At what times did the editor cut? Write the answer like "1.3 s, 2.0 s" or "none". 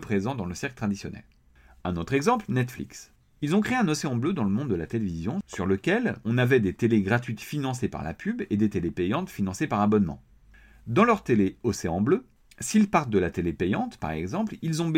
none